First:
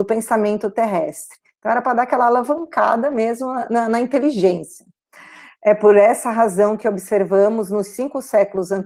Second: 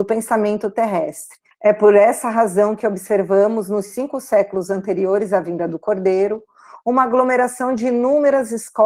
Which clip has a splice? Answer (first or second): second